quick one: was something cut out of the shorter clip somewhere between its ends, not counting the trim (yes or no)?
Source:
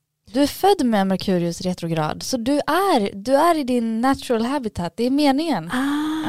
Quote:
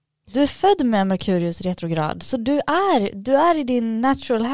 no